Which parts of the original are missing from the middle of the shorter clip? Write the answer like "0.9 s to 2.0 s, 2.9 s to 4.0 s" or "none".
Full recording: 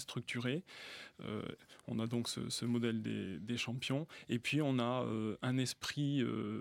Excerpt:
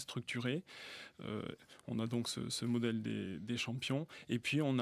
none

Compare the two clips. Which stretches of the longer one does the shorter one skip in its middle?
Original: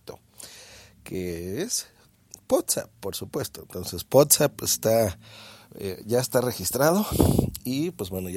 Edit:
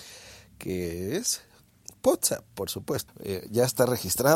3.5 s to 5.6 s

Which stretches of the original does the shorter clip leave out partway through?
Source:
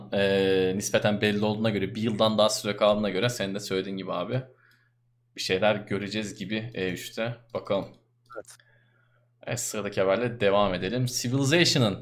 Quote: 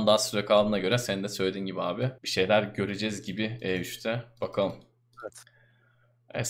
4.5 s to 5.3 s

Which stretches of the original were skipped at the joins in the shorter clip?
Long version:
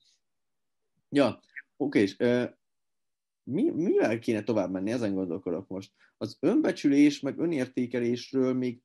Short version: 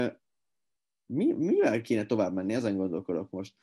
none

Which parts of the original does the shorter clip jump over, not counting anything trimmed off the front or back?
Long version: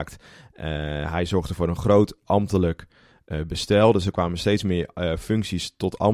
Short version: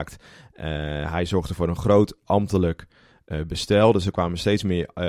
none

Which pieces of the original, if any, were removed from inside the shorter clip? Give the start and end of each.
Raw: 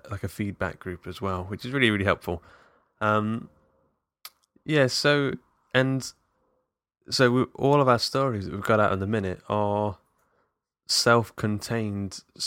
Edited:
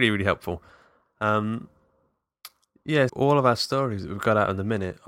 4.9 s to 7.5 s

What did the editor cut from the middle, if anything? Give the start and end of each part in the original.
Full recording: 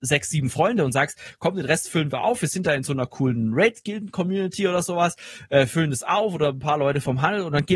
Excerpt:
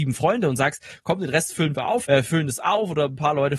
2.4 s to 5.5 s

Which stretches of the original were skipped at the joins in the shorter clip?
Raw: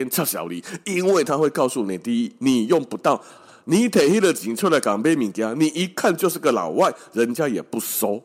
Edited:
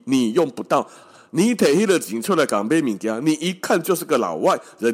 none

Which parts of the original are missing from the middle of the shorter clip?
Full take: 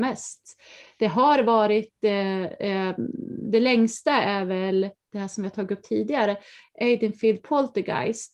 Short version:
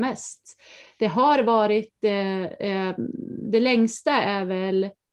none

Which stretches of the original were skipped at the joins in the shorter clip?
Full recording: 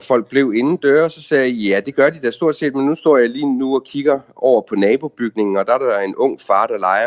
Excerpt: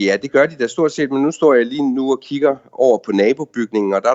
none

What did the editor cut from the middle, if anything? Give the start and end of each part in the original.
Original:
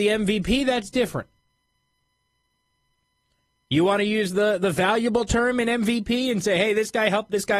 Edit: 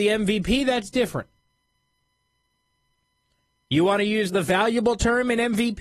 4.3 s to 4.6 s

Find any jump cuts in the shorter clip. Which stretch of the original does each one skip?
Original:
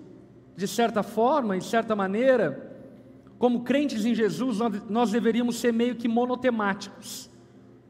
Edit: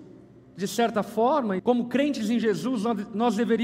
1.6 s to 3.3 s

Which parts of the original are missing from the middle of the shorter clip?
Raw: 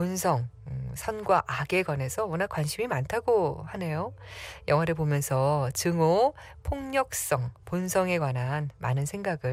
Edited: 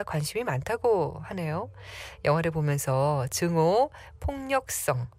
none

